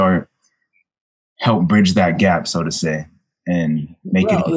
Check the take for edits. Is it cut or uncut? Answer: uncut